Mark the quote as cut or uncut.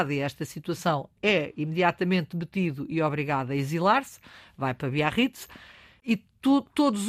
uncut